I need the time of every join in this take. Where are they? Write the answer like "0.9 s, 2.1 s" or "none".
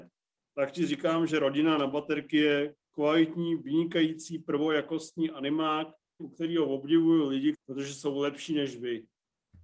6.2 s, 7.5 s